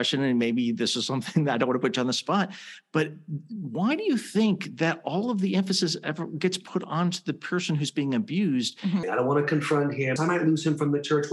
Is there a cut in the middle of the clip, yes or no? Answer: yes